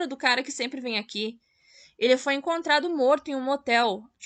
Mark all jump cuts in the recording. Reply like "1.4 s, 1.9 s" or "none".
none